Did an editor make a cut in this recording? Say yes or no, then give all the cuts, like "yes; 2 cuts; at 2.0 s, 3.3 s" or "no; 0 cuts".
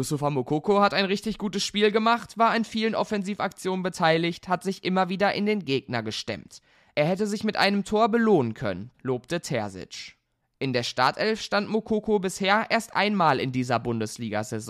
yes; 1 cut; at 8.9 s